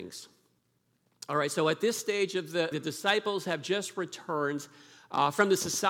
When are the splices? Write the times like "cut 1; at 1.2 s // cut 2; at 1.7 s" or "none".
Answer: cut 1; at 2.7 s